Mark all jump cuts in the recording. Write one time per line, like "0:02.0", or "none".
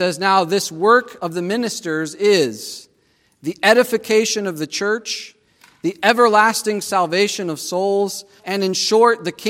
0:08.4